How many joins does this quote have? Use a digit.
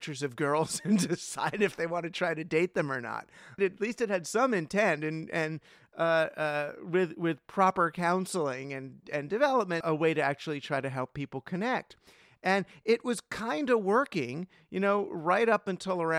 2